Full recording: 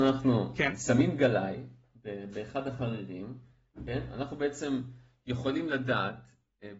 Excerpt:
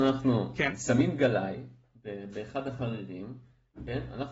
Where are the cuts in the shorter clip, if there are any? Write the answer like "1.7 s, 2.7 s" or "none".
none